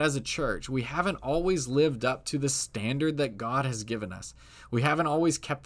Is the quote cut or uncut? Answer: uncut